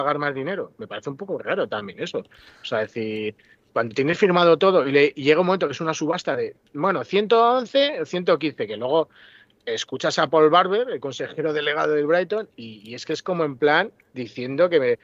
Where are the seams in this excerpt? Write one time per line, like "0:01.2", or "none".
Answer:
none